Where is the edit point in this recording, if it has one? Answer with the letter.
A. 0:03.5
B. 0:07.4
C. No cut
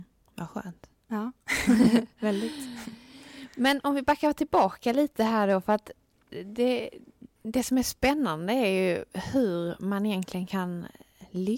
B